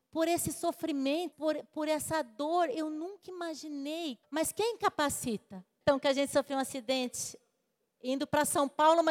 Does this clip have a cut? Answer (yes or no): yes